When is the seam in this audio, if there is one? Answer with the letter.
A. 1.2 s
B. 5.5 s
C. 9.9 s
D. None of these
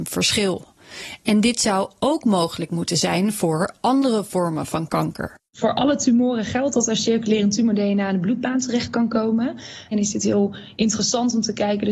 C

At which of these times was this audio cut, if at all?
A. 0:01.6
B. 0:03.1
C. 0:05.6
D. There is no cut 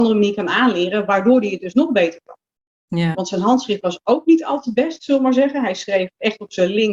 B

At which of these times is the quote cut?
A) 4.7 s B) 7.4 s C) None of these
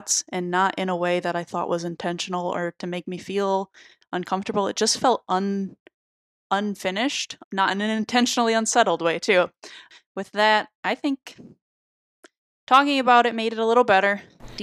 B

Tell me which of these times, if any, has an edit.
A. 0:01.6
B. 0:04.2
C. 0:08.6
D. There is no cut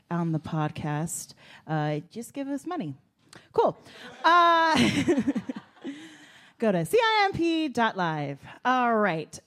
D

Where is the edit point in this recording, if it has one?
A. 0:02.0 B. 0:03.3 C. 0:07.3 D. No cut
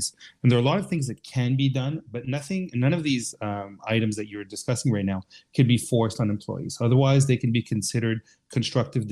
D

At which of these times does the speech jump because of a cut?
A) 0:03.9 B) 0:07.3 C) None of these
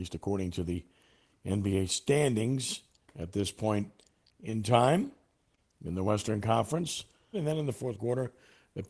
B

